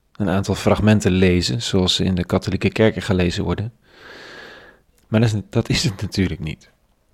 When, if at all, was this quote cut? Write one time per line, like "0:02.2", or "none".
0:04.9